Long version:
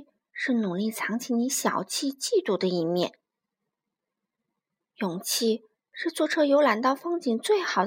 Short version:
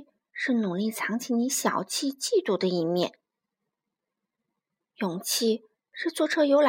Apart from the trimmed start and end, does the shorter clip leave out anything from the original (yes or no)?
no